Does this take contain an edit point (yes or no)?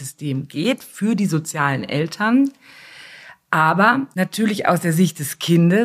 no